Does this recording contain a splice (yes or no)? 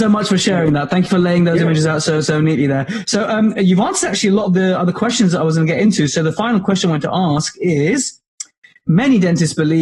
no